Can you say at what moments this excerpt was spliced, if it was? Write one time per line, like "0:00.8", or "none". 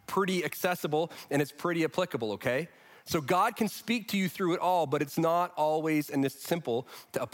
none